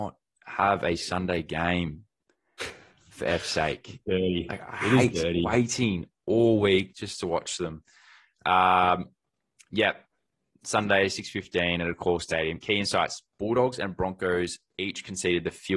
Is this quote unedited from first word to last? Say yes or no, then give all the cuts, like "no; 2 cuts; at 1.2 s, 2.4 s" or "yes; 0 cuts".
yes; 0 cuts